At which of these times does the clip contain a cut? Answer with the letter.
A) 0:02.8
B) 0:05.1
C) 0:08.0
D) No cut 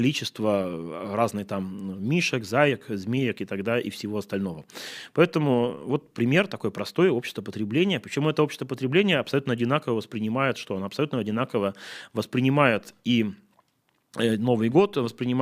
D